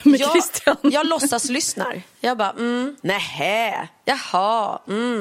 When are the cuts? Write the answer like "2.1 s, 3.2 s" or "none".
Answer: 3.0 s